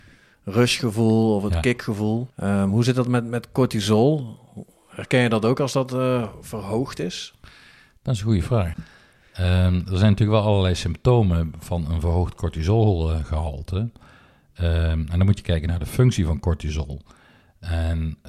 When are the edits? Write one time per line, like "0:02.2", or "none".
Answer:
0:02.3
0:08.7